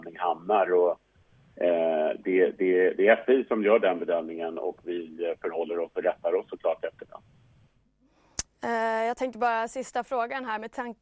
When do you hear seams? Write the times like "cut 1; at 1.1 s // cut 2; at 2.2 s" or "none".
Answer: none